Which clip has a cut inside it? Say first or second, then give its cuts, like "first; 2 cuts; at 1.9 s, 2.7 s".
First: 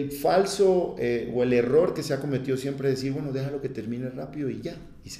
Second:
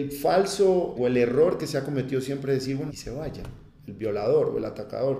second; 2 cuts; at 0.9 s, 2.9 s